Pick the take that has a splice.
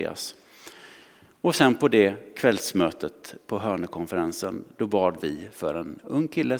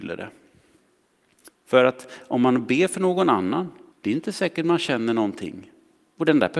second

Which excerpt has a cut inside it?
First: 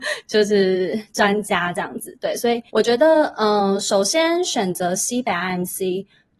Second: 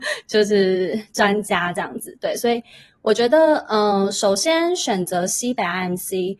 first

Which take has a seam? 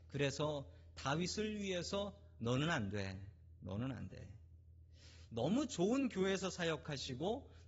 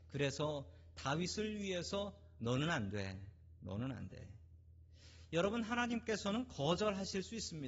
first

